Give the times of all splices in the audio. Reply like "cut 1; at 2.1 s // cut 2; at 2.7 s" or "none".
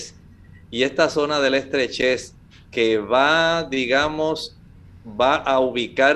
none